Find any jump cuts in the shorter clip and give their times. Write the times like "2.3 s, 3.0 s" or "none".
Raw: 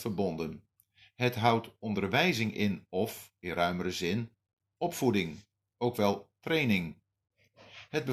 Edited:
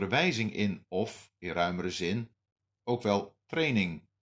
2.7 s